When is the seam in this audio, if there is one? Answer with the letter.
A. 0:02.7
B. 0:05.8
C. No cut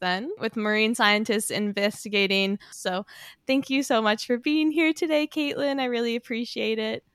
A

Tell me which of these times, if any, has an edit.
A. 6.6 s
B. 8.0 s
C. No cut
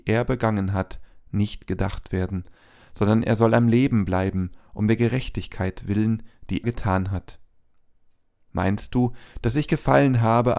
A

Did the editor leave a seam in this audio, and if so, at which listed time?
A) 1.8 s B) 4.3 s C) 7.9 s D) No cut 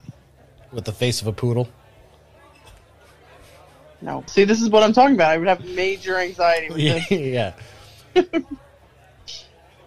B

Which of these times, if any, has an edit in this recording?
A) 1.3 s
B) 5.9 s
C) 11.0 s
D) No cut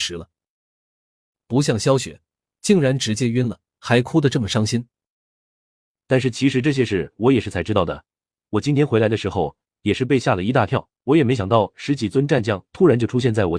C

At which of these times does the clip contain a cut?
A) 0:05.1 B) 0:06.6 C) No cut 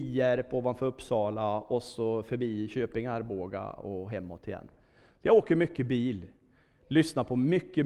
C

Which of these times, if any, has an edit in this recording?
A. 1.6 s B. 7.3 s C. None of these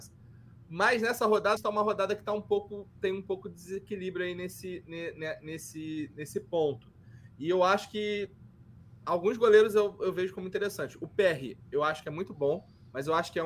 A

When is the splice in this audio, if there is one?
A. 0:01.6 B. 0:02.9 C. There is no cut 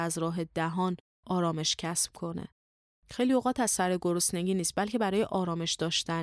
C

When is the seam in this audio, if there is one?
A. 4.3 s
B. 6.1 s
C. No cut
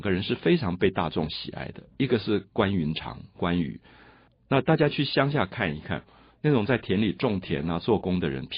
A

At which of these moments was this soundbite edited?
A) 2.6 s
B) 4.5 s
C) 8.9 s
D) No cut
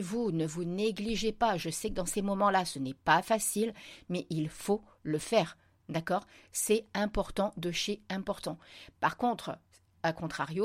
C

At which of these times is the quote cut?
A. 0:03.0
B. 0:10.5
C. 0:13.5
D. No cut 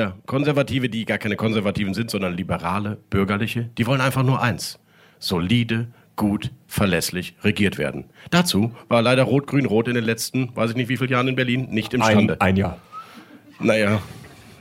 D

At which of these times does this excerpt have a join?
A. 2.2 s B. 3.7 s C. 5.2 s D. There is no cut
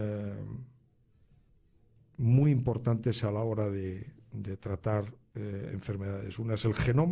D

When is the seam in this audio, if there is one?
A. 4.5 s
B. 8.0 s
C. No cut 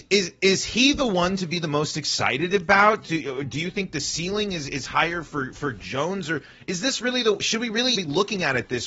B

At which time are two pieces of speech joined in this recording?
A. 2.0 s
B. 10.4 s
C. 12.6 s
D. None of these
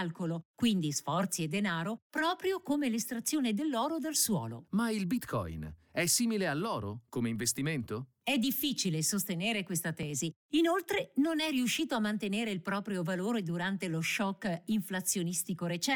B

